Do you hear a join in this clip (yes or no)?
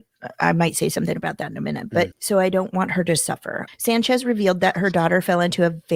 yes